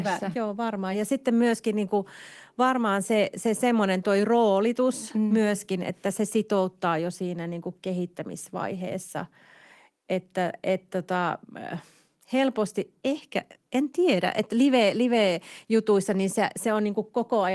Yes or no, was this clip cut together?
no